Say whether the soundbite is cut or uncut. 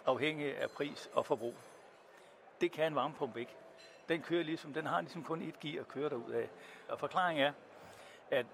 cut